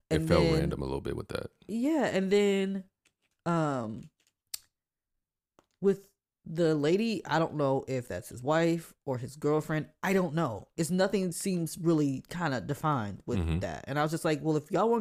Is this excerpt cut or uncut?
uncut